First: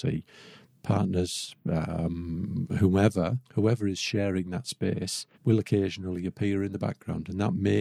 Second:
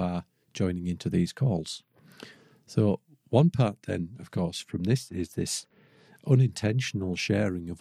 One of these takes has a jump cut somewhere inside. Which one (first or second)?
first